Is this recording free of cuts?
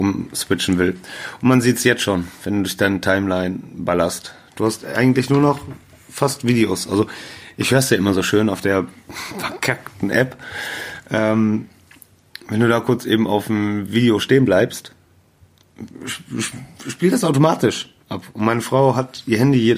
yes; 0 cuts

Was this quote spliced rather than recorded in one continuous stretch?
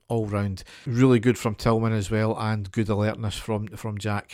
no; 0 cuts

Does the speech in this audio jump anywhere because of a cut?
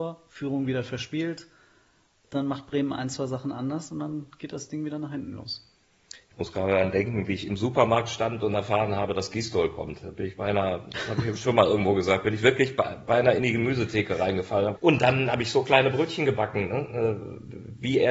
yes; 1 cut; at 14.8 s

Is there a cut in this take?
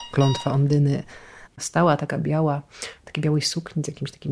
yes; 1 cut; at 1.5 s

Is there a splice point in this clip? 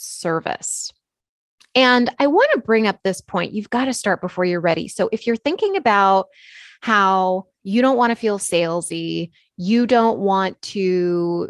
no; 0 cuts

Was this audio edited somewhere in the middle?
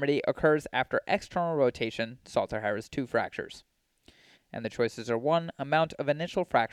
yes; 1 cut; at 4.3 s

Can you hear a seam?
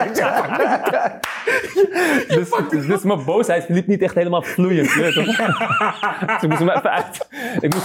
yes; 1 cut; at 2.7 s

